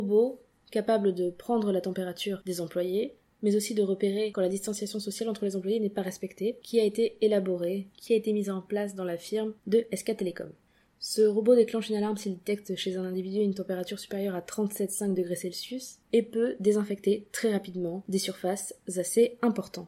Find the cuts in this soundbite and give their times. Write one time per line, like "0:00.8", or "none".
0:03.3
0:16.0